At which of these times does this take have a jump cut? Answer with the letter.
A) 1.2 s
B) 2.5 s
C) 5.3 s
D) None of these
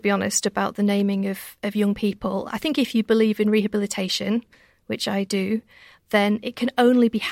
C